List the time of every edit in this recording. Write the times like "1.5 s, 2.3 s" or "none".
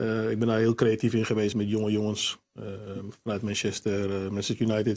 1.5 s